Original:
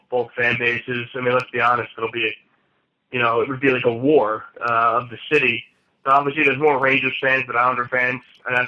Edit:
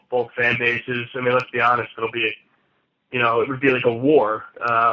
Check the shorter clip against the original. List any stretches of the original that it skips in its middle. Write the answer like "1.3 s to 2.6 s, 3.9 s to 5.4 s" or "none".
none